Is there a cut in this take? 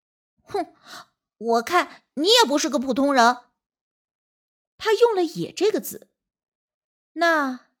no; 0 cuts

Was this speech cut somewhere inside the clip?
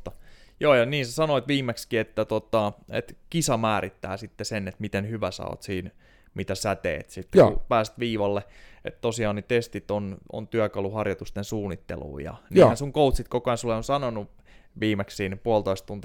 no; 0 cuts

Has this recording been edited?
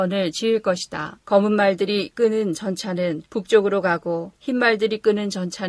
yes; 1 cut; at 1.2 s

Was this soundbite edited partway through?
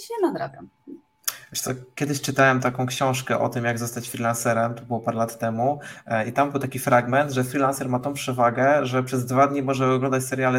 no; 0 cuts

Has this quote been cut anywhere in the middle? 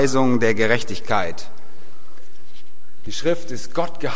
no; 0 cuts

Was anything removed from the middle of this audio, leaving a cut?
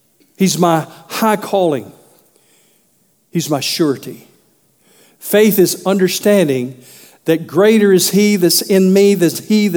no; 0 cuts

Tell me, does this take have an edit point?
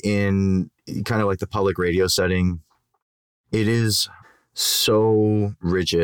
no; 0 cuts

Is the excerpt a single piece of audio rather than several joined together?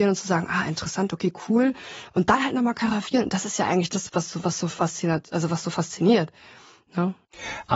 no; 1 cut; at 4.1 s

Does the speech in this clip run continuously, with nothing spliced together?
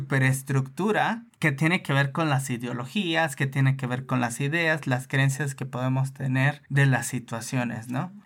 no; 1 cut; at 1.3 s

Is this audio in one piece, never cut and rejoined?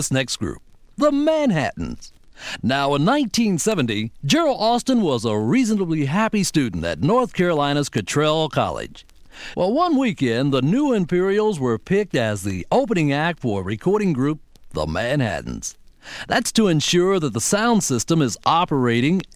no; 2 cuts; at 9.5 s, 16.2 s

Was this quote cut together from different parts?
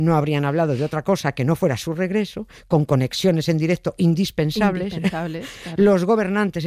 no; 0 cuts

